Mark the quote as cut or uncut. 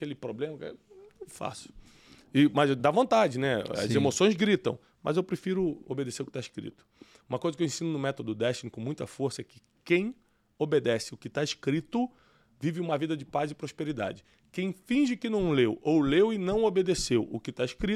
cut